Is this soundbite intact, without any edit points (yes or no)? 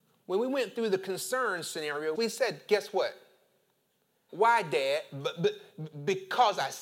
no